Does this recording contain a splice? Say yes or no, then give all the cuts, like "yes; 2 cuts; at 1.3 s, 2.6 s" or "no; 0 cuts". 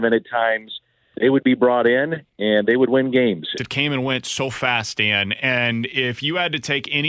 yes; 1 cut; at 3.6 s